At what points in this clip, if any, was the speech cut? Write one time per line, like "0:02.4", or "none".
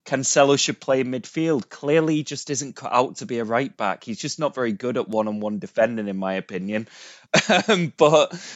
none